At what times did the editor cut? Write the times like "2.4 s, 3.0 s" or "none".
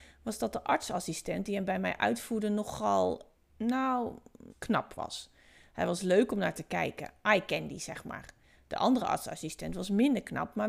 4.5 s